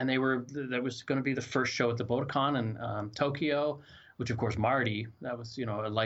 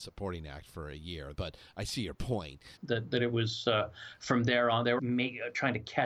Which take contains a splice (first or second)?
second